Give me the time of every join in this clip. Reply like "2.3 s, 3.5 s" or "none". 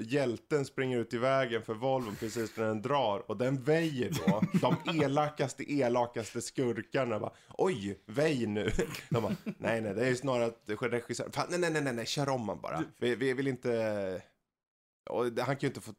none